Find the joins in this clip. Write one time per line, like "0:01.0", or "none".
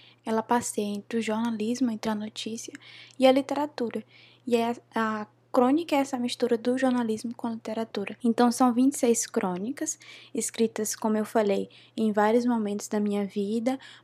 none